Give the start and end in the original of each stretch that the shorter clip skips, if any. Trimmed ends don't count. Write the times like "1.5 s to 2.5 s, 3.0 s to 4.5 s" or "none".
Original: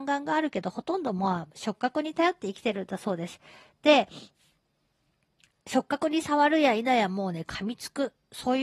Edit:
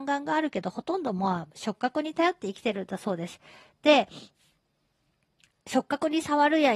none

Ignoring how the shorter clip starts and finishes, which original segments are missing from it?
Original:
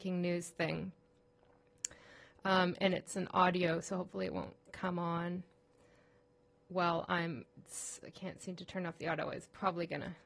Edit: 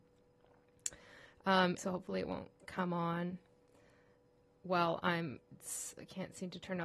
2.8 s to 3.8 s

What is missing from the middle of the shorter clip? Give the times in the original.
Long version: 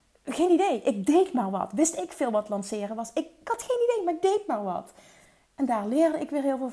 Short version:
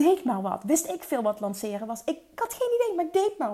none

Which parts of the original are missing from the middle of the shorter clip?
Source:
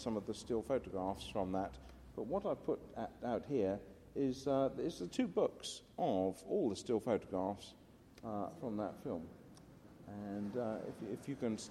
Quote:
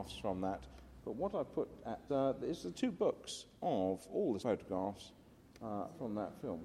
3.2 s to 4.4 s, 6.8 s to 7.0 s

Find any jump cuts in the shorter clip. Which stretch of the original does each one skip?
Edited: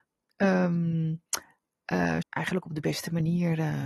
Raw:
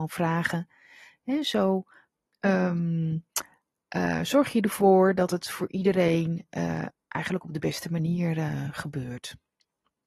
4.3 s to 7.0 s

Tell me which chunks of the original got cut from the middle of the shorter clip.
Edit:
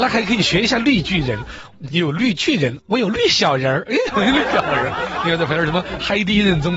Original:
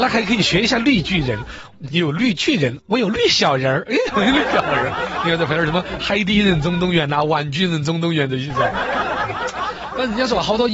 none

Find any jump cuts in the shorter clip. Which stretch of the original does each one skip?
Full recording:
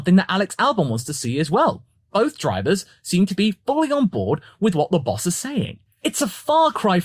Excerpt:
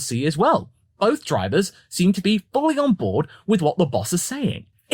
none

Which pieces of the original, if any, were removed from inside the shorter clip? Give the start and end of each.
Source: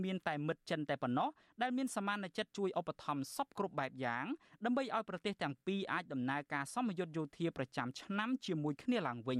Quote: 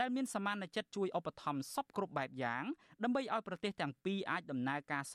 none

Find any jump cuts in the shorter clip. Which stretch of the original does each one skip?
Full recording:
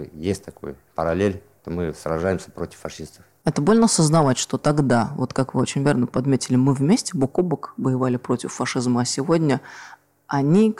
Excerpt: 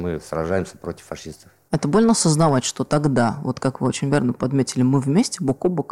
none

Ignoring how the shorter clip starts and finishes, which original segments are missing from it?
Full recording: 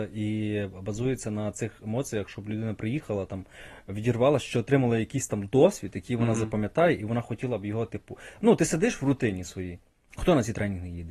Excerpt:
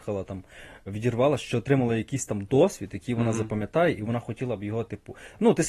none

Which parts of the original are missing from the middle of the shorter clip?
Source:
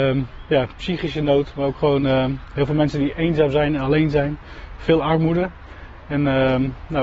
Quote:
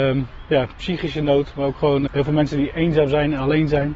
2.1 s to 2.5 s

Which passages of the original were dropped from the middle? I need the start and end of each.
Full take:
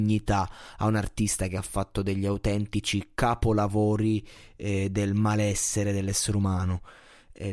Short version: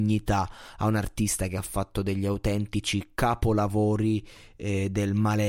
none

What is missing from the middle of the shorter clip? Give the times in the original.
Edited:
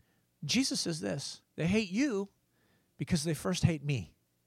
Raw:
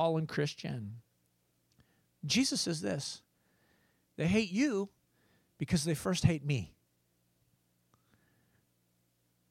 3.3 s to 4.1 s

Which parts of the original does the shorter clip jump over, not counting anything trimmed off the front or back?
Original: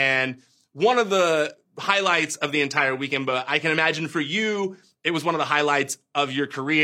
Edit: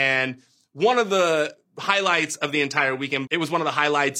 3.3 s to 5.0 s

